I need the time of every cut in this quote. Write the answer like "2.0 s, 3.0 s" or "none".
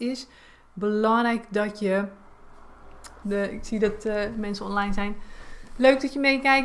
3.2 s